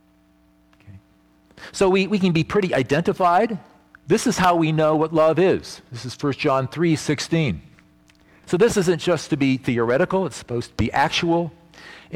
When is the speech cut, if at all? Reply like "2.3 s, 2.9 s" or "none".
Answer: 4.0 s, 8.4 s